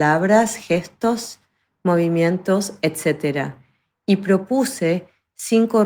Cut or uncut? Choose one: uncut